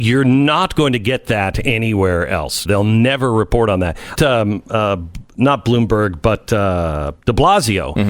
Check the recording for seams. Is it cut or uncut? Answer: cut